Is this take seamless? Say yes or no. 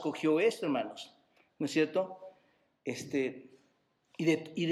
yes